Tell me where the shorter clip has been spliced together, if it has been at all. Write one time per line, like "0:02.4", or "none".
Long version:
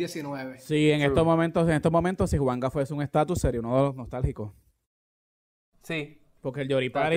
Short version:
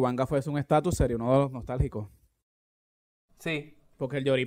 none